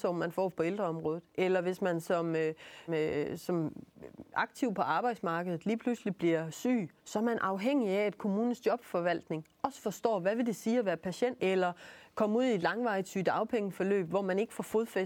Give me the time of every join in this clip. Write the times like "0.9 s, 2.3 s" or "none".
2.9 s, 7.0 s, 11.4 s